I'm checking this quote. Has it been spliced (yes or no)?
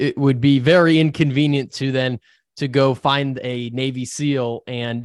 no